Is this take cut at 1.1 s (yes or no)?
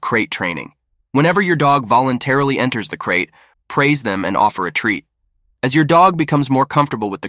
no